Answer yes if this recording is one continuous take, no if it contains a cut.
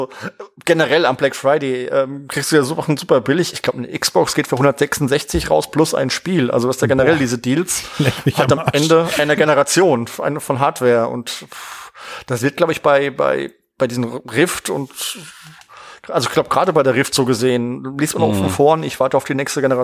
yes